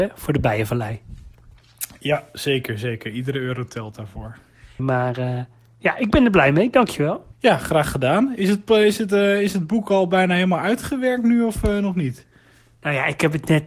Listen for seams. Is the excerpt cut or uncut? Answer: cut